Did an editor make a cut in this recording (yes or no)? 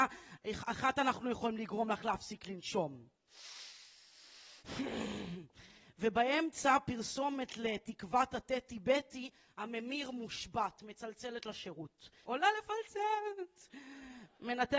yes